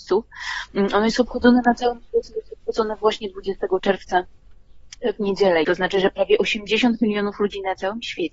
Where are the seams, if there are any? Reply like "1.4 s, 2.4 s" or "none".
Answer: 5.6 s